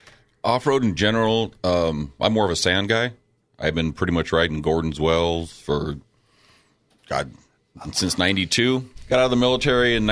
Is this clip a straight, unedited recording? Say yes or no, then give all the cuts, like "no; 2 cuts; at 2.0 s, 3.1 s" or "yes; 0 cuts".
yes; 0 cuts